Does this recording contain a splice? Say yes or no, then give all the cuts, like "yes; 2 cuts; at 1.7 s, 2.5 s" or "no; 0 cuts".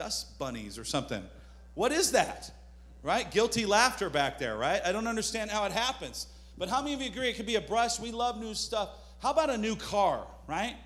no; 0 cuts